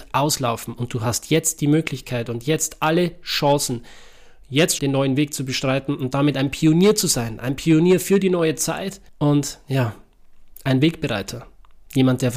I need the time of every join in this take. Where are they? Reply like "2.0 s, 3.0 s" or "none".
4.8 s, 9.1 s